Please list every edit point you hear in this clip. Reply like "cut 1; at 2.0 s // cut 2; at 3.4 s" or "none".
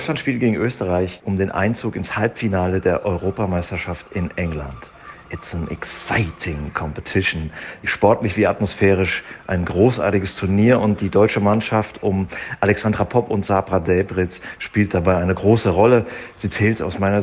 none